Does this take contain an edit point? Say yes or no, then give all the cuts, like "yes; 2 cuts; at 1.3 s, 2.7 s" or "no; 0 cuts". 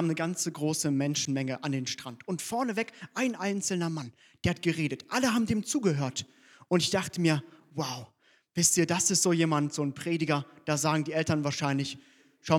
no; 0 cuts